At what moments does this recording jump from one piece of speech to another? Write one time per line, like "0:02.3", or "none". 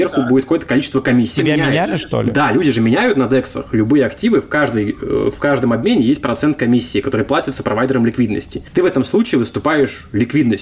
0:01.4